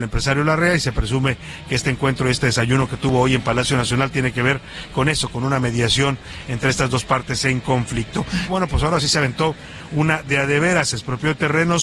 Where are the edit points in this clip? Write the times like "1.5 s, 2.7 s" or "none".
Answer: 8.5 s